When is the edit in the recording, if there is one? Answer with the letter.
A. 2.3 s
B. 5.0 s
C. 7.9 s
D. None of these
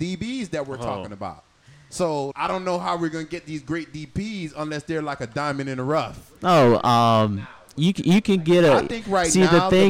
A